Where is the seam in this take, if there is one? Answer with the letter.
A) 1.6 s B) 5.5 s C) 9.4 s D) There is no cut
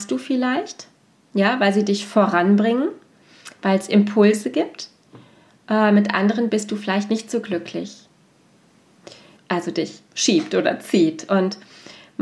C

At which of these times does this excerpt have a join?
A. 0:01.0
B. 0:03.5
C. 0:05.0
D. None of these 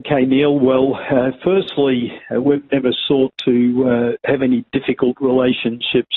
D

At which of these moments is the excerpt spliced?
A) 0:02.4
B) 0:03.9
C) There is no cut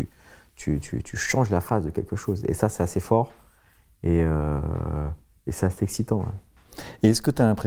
C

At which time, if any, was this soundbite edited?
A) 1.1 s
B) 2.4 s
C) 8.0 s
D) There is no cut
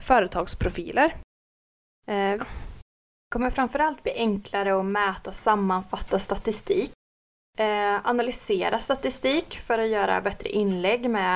B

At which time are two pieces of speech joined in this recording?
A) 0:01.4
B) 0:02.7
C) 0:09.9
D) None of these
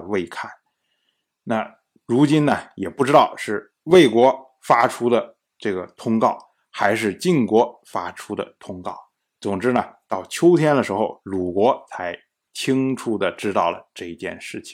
D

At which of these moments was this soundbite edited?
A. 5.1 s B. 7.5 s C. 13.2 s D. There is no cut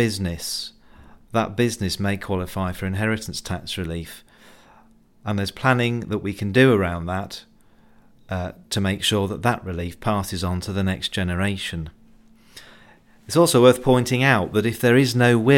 D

